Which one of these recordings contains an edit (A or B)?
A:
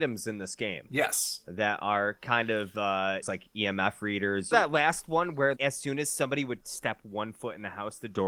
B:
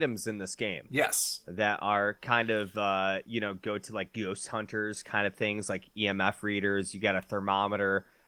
A